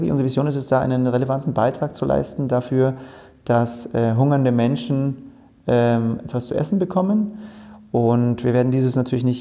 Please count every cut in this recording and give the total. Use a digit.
0